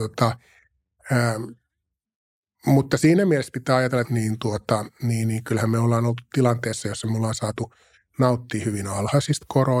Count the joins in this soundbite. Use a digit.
1